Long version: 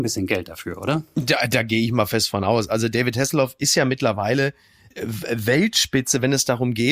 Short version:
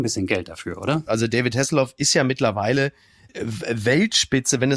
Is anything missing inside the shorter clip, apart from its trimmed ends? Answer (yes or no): yes